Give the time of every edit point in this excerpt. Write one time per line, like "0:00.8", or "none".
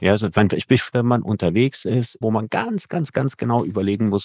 0:00.9
0:02.2